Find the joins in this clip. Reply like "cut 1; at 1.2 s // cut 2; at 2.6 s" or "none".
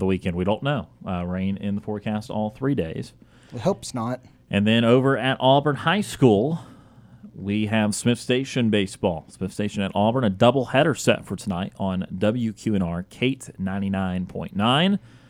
none

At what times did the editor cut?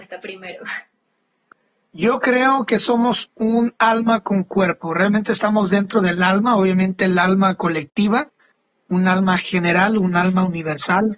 none

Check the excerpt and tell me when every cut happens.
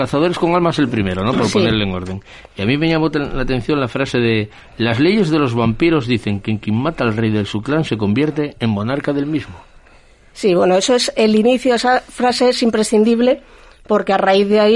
none

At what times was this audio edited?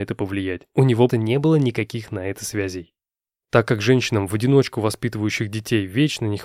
cut 1; at 1.1 s // cut 2; at 3.4 s

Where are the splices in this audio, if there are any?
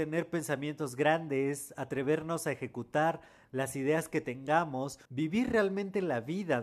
cut 1; at 5.1 s

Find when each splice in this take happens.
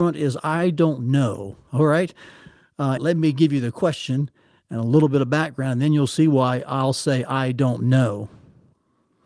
cut 1; at 3.0 s

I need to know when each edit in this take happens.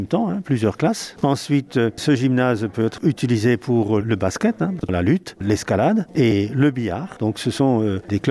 cut 1; at 4.0 s // cut 2; at 5.4 s

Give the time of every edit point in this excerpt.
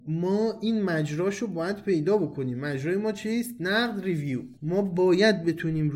cut 1; at 4.6 s

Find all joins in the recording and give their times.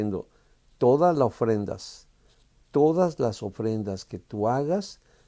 none

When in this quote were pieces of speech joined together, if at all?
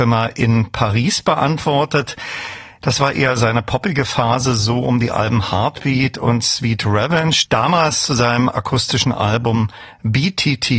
cut 1; at 2.8 s // cut 2; at 7.5 s

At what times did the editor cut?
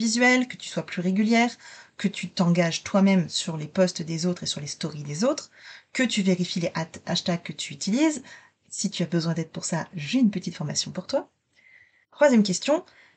cut 1; at 12.0 s

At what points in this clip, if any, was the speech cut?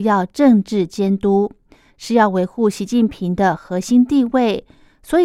none

